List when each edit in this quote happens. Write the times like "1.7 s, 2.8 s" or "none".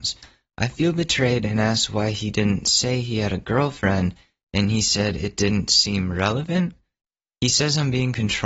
none

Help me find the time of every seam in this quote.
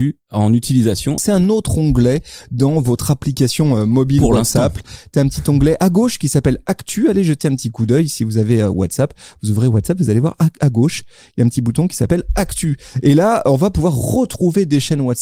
1.2 s

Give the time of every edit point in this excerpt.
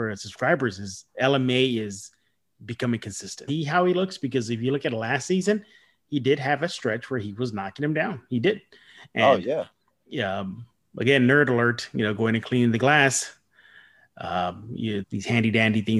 3.5 s, 15.0 s

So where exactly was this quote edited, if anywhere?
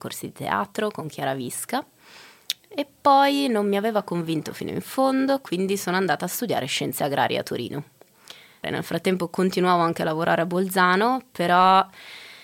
8.6 s

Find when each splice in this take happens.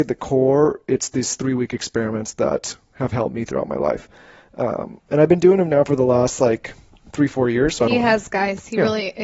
none

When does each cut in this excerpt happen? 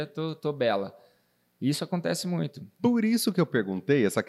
none

